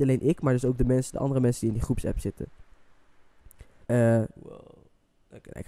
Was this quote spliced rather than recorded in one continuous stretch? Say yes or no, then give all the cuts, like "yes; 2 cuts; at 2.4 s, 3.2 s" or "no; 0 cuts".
yes; 1 cut; at 3.8 s